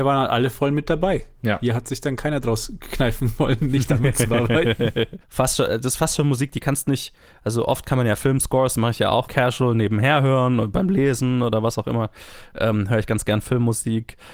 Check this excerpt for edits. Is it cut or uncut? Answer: cut